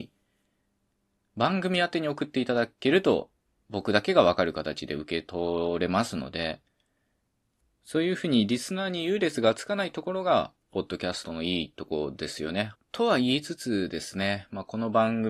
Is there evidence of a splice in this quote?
yes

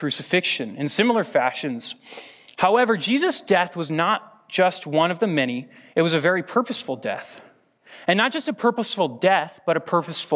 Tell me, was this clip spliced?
no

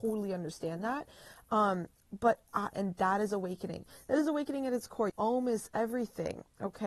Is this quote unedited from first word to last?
no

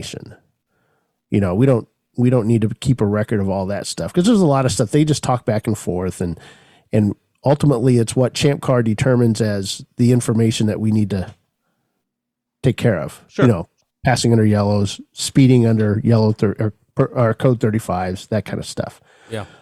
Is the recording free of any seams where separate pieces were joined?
no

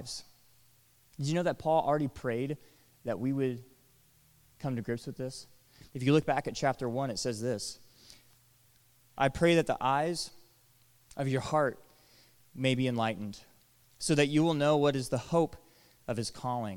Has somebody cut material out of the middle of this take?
no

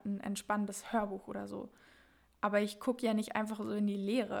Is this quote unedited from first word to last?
yes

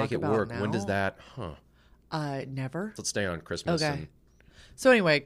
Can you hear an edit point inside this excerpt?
yes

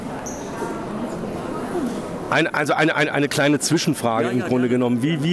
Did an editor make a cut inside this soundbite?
no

